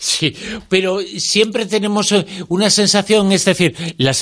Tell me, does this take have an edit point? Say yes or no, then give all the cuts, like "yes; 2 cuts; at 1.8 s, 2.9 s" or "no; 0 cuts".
no; 0 cuts